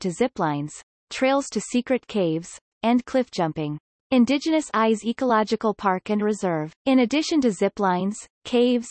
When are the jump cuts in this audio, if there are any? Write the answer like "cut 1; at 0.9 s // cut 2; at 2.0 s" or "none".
cut 1; at 2.7 s // cut 2; at 3.9 s // cut 3; at 6.8 s